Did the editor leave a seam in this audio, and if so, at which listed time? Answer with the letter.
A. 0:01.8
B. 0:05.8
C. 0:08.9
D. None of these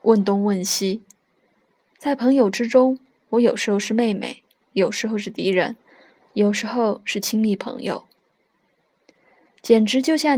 D